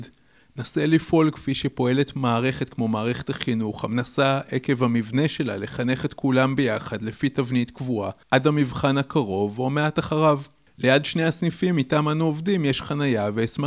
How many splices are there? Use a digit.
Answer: 2